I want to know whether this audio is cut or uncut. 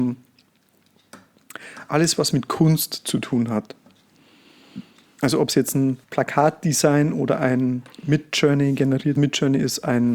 cut